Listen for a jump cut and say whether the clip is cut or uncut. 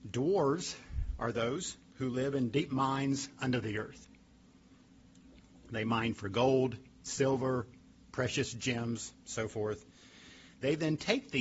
uncut